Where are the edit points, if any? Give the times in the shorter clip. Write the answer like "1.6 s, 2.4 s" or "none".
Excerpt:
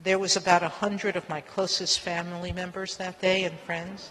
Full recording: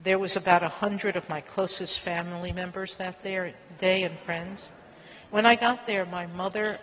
3.2 s